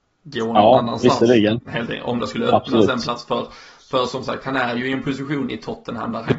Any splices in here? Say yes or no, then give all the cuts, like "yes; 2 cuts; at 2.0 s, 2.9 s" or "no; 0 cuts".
no; 0 cuts